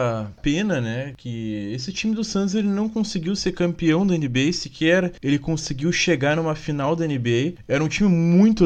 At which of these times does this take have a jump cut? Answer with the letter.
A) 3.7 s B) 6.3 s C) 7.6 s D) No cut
D